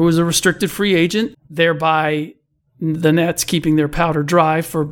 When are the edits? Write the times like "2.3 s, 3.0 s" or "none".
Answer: 1.3 s